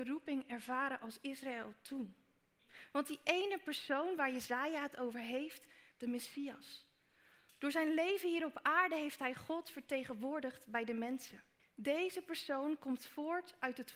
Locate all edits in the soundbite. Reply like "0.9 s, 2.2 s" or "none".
5.9 s, 11.6 s